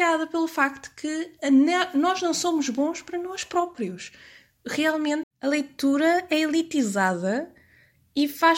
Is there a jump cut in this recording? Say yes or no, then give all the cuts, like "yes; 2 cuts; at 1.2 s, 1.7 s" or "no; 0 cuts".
yes; 1 cut; at 5.2 s